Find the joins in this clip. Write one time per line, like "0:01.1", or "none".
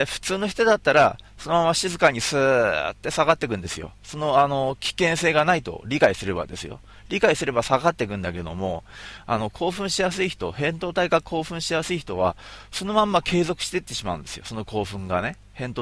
none